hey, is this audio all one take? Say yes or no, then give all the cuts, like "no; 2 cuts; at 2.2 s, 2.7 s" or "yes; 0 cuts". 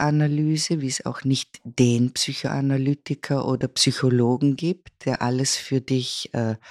yes; 0 cuts